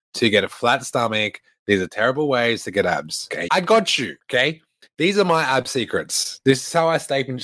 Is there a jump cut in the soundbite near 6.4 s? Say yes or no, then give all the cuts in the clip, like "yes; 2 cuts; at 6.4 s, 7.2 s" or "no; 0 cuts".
no; 1 cut; at 3.5 s